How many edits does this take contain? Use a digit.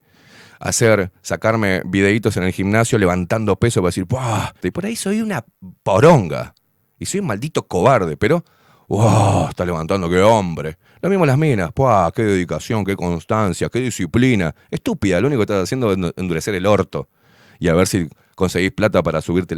1